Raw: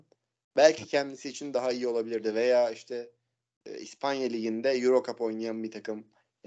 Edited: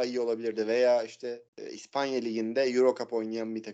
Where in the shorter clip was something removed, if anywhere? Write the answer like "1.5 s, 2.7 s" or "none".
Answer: 1.5 s